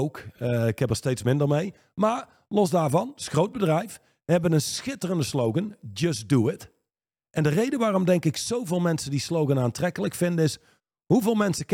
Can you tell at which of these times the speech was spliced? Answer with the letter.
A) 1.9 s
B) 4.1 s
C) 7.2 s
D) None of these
D